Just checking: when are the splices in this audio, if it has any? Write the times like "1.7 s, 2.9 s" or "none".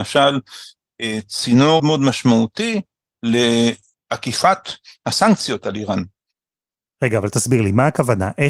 1.8 s

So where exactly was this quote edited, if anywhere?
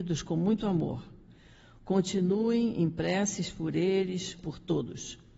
4.3 s

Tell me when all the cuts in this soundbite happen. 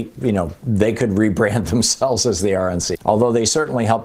2.9 s

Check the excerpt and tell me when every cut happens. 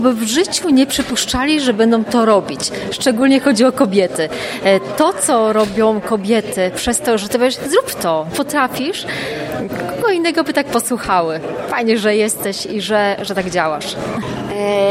8.3 s

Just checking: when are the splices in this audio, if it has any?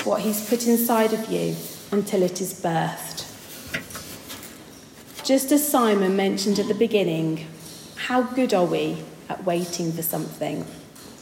none

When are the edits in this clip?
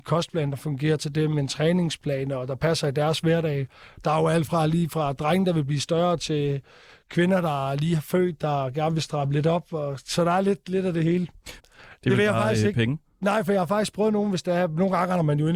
11.6 s

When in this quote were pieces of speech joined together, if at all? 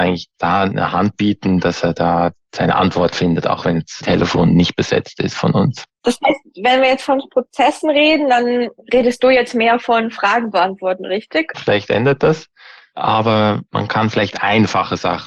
11.5 s

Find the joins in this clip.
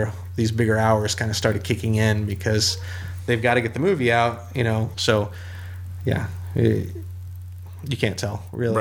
4.9 s

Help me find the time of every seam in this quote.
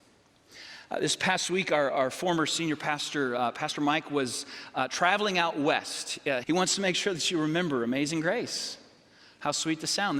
6.4 s

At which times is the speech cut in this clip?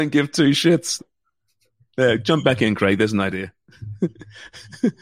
1.0 s

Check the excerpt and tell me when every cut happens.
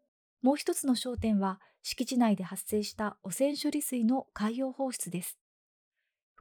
none

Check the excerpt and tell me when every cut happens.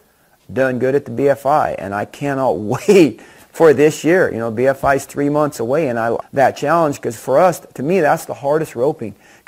6.2 s

